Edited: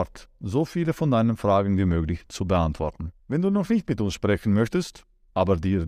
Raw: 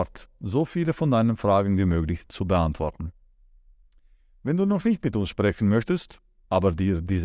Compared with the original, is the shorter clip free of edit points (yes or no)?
no